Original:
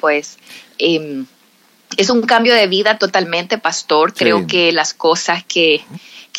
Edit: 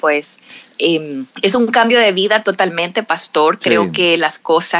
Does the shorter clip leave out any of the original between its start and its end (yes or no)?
yes